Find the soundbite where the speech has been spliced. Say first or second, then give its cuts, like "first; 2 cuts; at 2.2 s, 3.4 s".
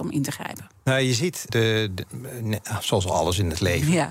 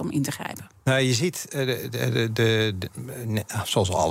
first; 1 cut; at 1.5 s